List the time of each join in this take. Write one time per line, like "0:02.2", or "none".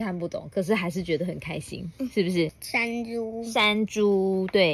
0:02.5